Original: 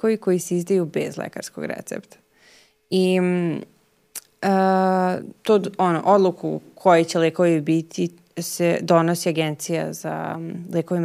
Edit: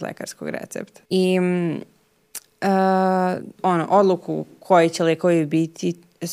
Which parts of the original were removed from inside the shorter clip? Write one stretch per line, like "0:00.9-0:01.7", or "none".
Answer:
0:02.2-0:02.9
0:05.4-0:05.7

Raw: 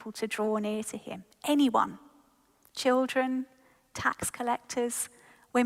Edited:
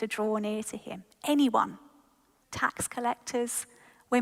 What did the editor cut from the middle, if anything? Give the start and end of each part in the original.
0:02.6-0:03.8

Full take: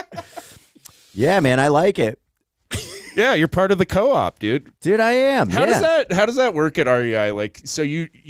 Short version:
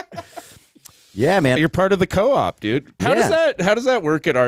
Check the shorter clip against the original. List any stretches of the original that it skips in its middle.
0:01.6-0:03.3
0:04.8-0:05.5

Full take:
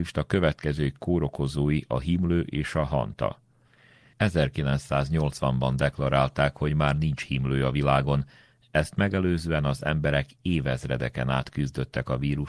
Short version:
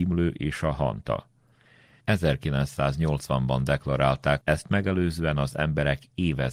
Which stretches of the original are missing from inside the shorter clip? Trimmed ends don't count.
0:06.5-0:08.7

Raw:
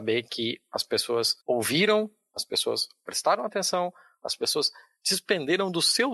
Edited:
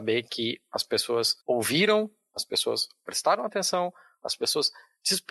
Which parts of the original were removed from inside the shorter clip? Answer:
none

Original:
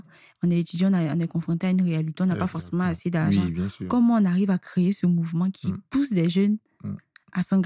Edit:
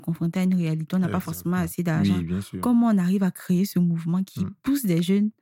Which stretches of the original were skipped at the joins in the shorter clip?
none

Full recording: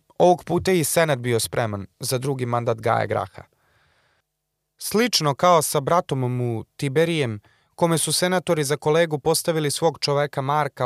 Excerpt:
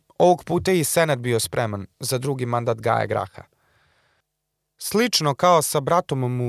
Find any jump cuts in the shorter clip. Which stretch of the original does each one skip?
none

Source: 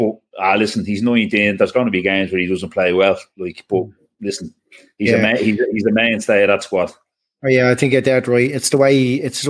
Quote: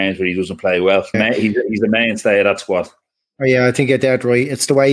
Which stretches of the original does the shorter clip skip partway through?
0:03.3-0:05.2

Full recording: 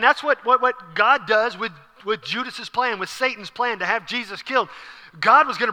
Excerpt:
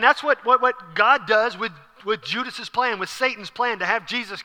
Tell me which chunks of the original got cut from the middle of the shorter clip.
none

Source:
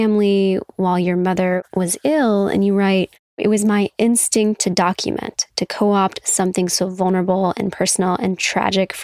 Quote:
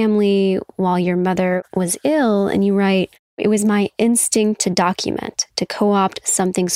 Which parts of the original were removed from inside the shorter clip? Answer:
none

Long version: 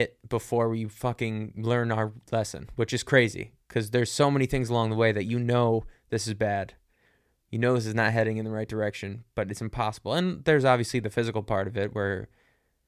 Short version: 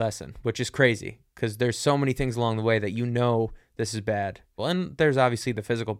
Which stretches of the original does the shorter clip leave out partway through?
0:06.9-0:10.1

